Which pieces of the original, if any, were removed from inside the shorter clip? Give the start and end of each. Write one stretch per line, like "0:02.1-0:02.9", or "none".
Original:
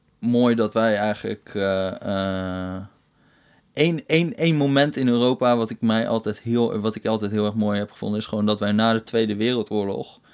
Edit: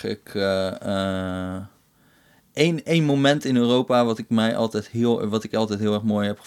0:04.0-0:04.4